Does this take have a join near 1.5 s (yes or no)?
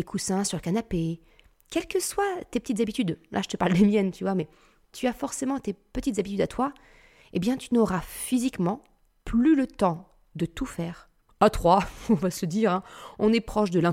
no